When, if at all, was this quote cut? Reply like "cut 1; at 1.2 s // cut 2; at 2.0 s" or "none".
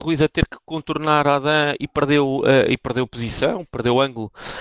none

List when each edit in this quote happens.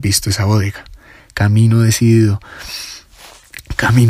cut 1; at 1.2 s

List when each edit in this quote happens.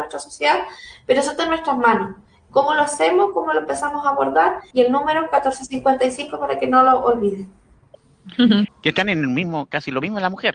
cut 1; at 4.7 s // cut 2; at 8.7 s

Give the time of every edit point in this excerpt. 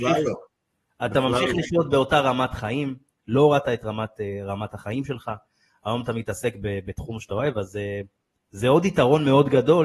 none

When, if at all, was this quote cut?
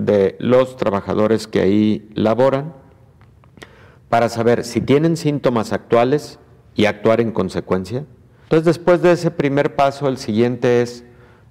cut 1; at 8.5 s

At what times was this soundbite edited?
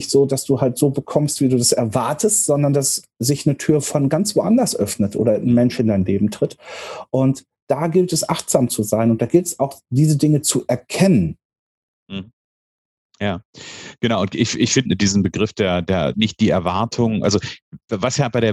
cut 1; at 14.9 s // cut 2; at 16.1 s

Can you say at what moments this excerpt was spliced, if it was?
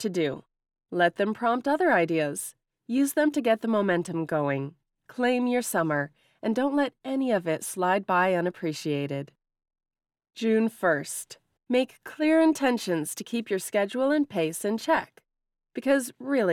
cut 1; at 11.6 s

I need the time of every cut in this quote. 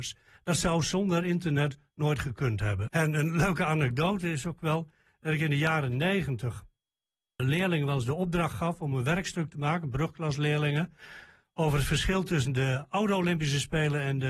cut 1; at 2.9 s // cut 2; at 7.4 s

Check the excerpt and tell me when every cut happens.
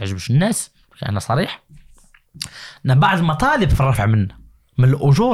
none

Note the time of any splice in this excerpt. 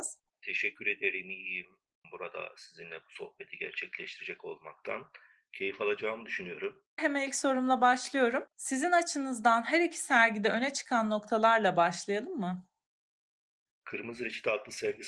cut 1; at 2.0 s // cut 2; at 7.0 s // cut 3; at 8.5 s

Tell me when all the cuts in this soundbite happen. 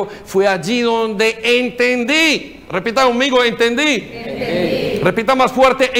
none

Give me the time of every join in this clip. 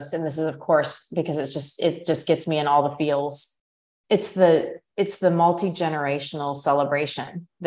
none

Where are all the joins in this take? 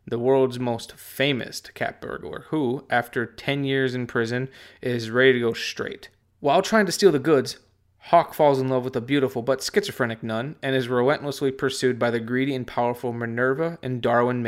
cut 1; at 6.2 s

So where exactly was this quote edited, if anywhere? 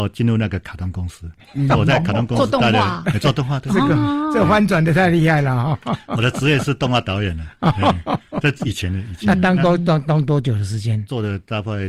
none

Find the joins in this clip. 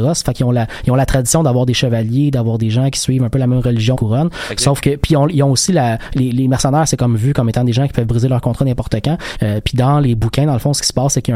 cut 1; at 3.9 s // cut 2; at 9.3 s

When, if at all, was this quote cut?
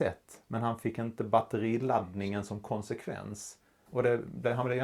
cut 1; at 3.9 s

